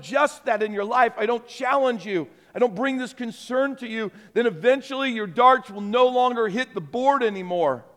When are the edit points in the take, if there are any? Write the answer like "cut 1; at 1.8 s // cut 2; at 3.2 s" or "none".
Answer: none